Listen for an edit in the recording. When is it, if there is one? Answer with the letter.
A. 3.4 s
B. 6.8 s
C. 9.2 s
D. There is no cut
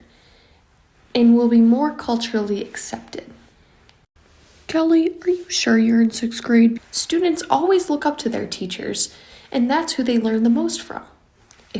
B